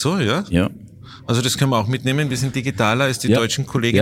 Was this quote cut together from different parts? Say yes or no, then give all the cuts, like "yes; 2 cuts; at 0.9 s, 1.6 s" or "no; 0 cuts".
no; 0 cuts